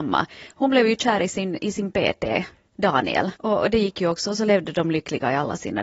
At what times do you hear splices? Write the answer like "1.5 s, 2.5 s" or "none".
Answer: 3.3 s